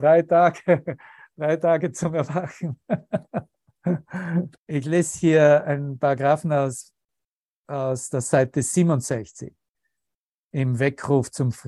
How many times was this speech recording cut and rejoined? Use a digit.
1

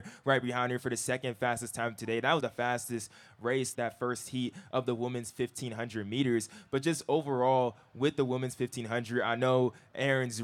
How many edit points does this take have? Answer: 2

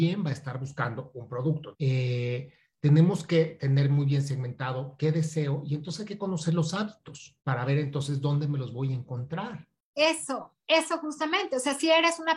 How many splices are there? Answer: 2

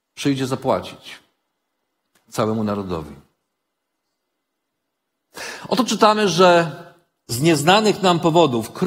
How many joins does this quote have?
0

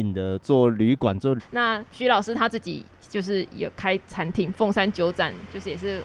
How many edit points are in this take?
1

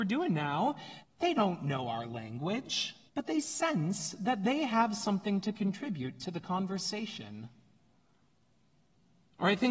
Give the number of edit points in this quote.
2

